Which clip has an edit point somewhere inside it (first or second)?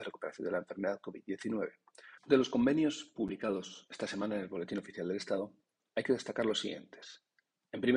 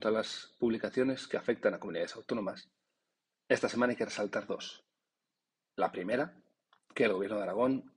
first